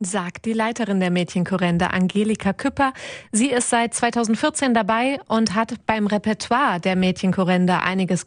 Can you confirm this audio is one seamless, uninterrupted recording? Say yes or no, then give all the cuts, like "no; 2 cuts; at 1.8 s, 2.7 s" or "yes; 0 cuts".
yes; 0 cuts